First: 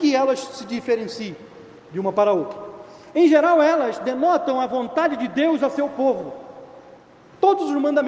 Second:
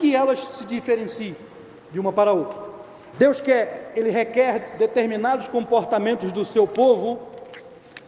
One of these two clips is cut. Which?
second; 1 cut; at 3.1 s

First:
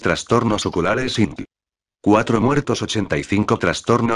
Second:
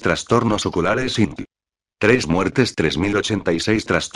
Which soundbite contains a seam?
first; 1 cut; at 1.9 s

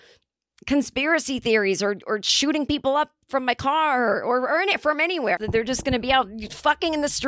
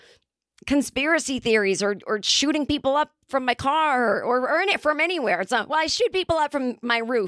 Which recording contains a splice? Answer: first; 1 cut; at 5.4 s

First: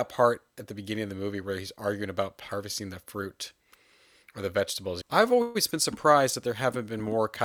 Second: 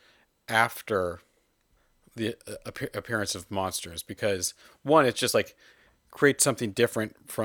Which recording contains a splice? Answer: first; 1 cut; at 5.0 s

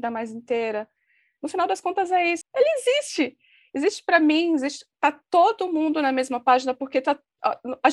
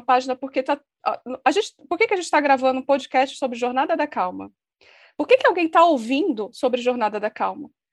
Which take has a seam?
first; 1 cut; at 2.4 s

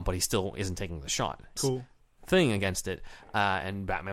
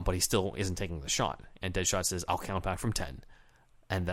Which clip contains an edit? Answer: first; 1 cut; at 1.6 s

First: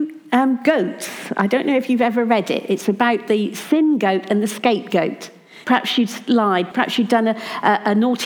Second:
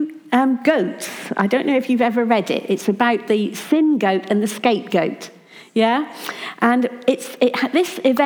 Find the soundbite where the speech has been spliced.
first; 2 cuts; at 5.6 s, 6.7 s

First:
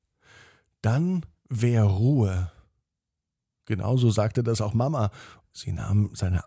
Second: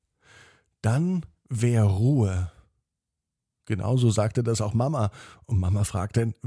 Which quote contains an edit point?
first; 1 cut; at 5.4 s

